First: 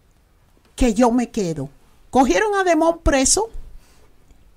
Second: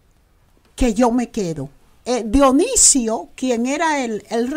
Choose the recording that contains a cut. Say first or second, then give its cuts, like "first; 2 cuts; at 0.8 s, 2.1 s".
second; 1 cut; at 2.0 s